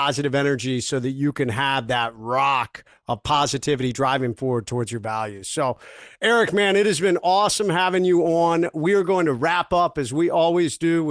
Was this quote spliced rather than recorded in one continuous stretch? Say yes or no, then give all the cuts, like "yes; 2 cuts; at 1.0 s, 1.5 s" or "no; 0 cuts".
no; 0 cuts